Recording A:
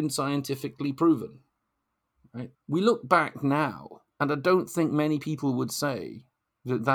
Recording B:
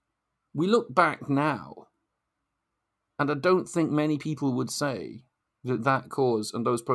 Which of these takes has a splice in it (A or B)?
A